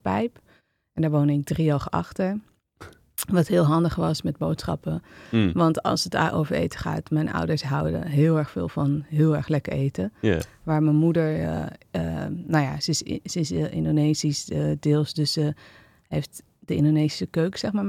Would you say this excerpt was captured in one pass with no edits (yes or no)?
yes